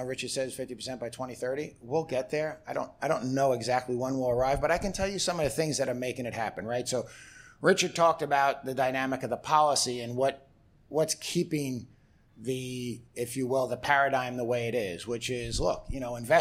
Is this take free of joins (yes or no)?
yes